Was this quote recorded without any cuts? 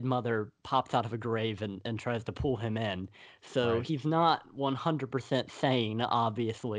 yes; 0 cuts

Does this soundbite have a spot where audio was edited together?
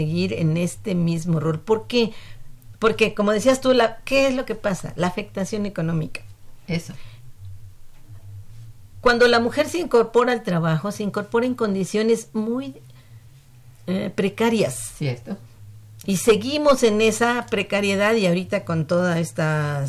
no; 0 cuts

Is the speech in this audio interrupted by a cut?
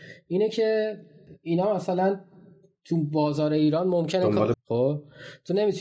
yes; 1 cut; at 4.5 s

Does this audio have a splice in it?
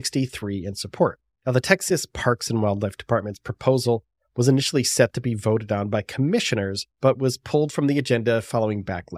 yes; 2 cuts; at 1.4 s, 6.9 s

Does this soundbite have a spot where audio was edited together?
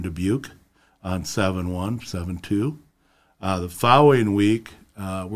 no; 0 cuts

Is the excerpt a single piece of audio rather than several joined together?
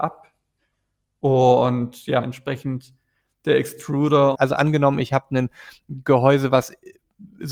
no; 2 cuts; at 2.2 s, 4.3 s

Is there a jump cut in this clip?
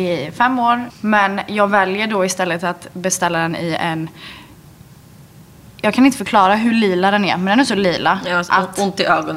yes; 1 cut; at 0.9 s

